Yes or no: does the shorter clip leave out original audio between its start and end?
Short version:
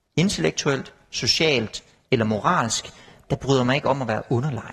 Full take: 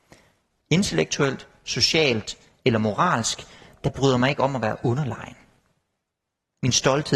no